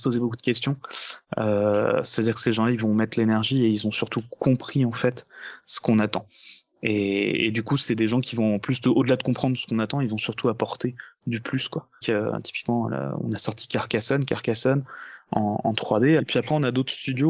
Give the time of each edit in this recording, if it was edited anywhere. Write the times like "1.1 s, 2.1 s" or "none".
12.0 s, 16.2 s